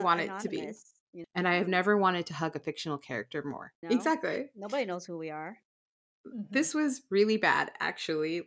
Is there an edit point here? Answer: yes; 2 cuts; at 1.2 s, 3.8 s

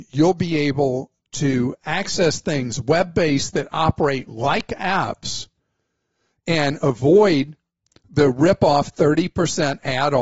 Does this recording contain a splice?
no; 0 cuts

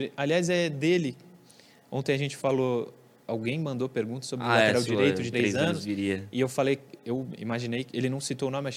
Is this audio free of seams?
no; 1 cut; at 5.3 s

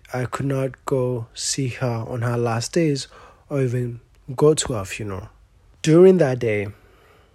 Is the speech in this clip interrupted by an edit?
yes; 1 cut; at 5.7 s

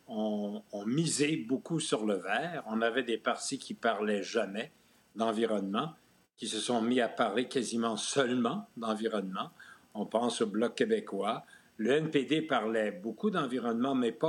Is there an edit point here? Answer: no; 0 cuts

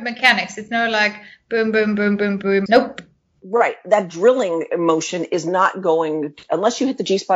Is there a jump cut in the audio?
yes; 1 cut; at 2.7 s

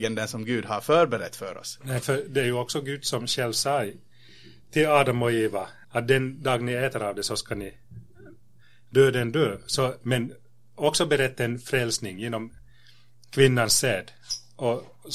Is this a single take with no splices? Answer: no; 2 cuts; at 5.8 s, 10.0 s

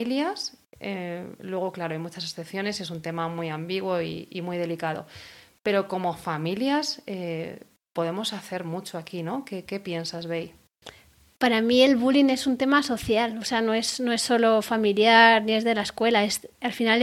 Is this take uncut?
yes; 0 cuts

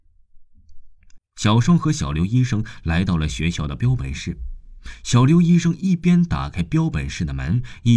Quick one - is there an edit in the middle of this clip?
yes; 1 cut; at 1.2 s

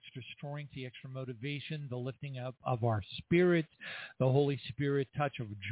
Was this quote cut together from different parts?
no; 0 cuts

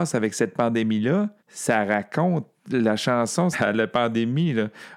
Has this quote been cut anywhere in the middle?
yes; 2 cuts; at 1.4 s, 3.5 s

